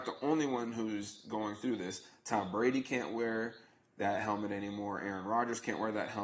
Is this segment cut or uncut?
uncut